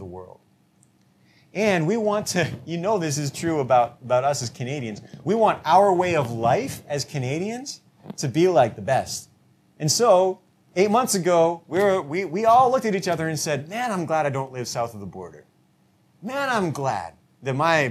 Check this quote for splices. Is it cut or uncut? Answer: uncut